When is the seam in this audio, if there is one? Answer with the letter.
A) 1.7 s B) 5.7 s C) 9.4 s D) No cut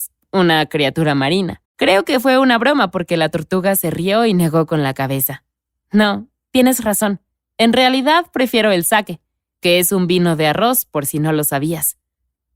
A